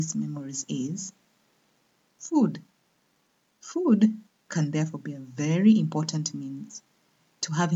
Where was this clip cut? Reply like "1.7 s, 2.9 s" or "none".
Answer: none